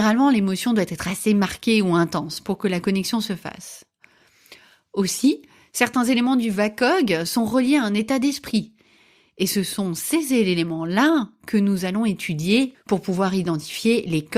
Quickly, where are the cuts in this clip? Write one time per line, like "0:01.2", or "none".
0:12.7